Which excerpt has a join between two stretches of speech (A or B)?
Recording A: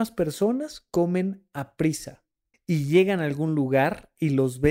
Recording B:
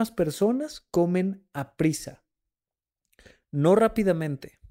A